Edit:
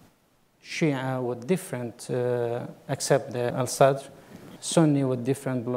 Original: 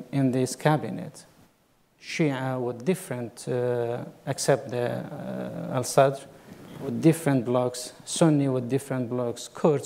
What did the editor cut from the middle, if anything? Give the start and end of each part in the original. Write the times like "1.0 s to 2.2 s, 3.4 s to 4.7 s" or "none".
4.9 s to 5.7 s, 6.7 s to 8.0 s